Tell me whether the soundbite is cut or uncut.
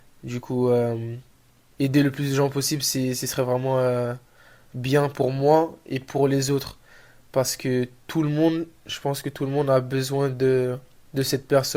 uncut